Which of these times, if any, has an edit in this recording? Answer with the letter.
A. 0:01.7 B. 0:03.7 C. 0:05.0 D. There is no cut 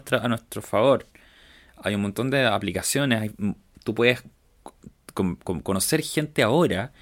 D